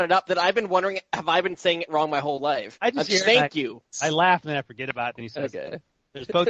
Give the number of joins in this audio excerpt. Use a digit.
0